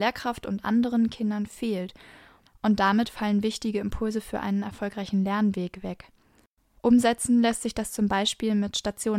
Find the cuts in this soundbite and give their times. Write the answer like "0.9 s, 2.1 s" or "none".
6.8 s